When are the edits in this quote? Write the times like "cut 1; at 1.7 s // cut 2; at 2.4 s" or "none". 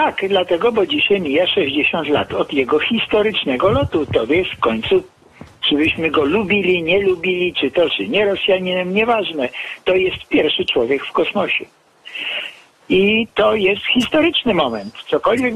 cut 1; at 7.9 s